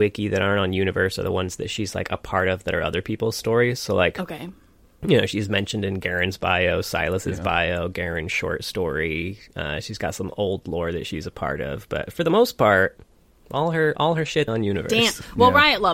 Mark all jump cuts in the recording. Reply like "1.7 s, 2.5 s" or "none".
14.5 s